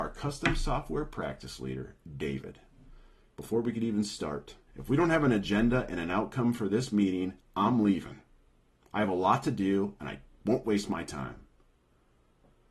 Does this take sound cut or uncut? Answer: cut